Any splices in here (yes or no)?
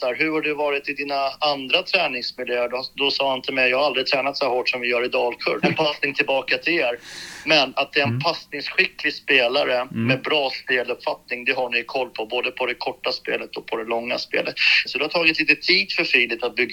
yes